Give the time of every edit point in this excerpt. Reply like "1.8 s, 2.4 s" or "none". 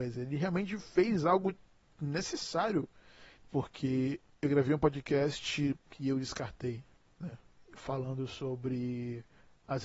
3.4 s, 5.9 s